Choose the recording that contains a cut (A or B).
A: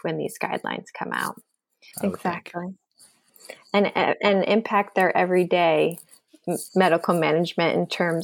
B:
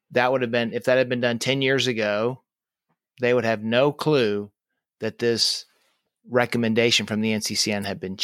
A